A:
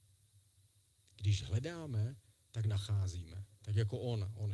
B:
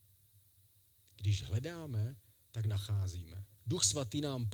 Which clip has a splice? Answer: B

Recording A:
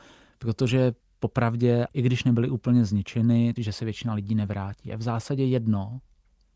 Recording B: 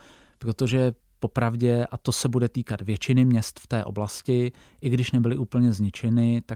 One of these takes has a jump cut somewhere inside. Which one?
A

